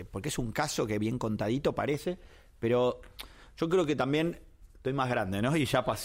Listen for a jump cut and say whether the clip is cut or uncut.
uncut